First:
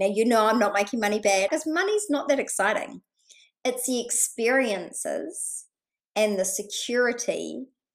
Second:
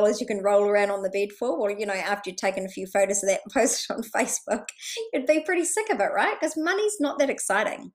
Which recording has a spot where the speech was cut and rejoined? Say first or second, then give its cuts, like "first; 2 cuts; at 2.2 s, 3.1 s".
first; 1 cut; at 1.5 s